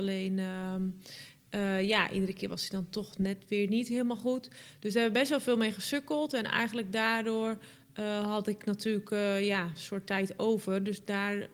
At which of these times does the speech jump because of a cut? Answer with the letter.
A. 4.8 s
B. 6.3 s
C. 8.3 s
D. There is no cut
D